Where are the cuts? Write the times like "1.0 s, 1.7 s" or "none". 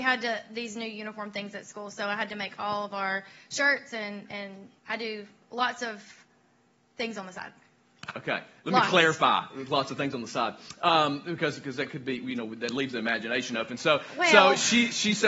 4.8 s